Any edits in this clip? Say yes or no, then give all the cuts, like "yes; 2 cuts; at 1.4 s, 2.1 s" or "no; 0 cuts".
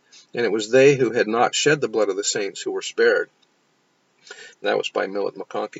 yes; 1 cut; at 4.5 s